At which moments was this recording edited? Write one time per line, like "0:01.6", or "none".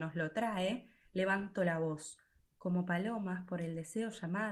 0:02.4